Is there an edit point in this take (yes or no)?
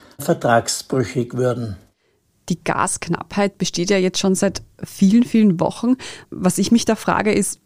no